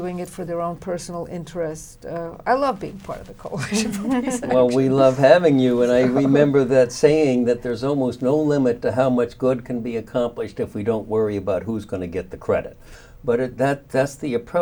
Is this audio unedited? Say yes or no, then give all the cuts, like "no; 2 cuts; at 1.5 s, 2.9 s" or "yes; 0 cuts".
yes; 0 cuts